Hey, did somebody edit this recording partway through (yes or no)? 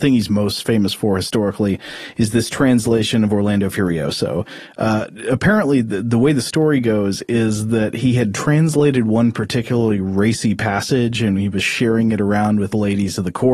no